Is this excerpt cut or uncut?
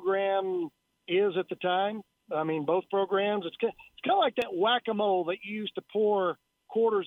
uncut